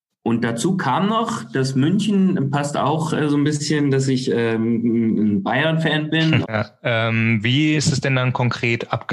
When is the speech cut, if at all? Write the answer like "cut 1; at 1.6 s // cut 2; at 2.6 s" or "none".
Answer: cut 1; at 6.4 s // cut 2; at 7.8 s